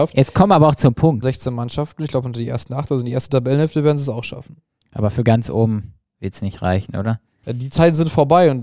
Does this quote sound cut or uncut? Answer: cut